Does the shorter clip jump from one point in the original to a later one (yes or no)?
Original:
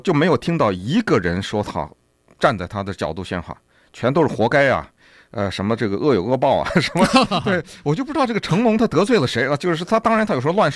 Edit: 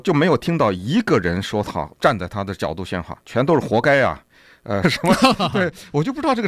yes